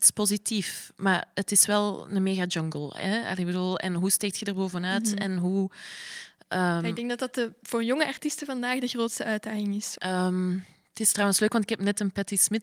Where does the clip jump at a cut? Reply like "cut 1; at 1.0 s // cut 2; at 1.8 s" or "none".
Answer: cut 1; at 10.0 s